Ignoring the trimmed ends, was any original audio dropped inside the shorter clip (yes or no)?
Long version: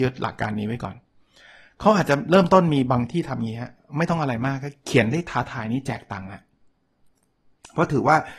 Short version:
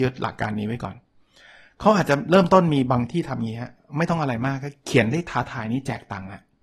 no